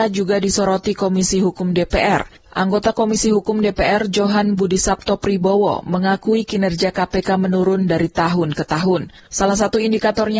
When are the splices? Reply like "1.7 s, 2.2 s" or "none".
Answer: none